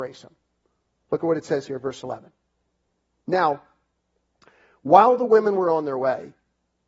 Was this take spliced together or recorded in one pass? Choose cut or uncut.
uncut